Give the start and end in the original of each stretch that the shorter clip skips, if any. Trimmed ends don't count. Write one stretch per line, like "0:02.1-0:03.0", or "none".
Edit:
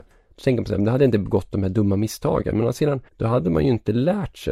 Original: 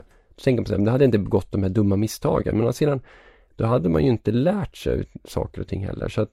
0:03.1-0:03.5

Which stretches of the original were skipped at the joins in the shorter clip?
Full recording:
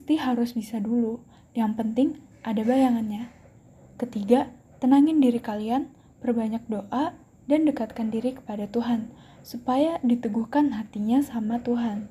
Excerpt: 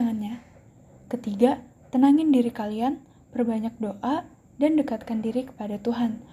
none

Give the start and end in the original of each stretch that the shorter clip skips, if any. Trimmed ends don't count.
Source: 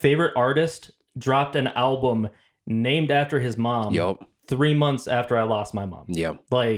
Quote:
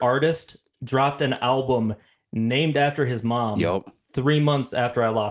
none

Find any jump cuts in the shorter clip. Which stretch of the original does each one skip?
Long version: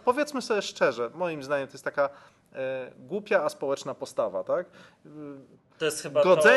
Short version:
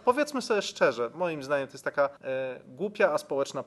0:02.2-0:02.5

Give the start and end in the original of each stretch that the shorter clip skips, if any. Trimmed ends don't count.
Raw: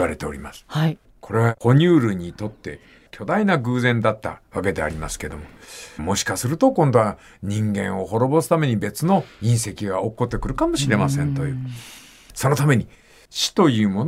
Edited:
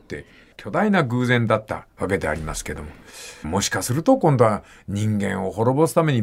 none

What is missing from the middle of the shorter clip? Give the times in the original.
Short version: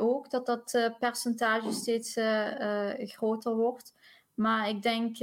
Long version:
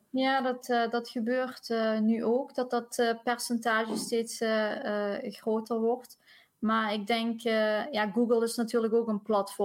none

